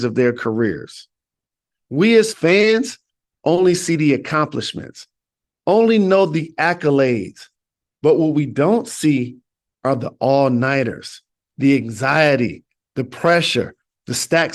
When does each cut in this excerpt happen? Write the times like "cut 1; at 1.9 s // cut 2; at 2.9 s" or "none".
none